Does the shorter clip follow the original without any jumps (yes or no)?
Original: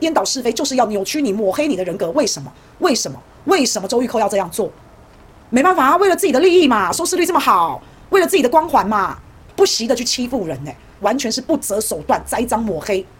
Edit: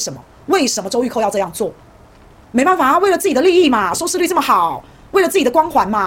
yes